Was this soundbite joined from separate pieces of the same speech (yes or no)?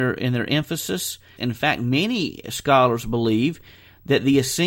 yes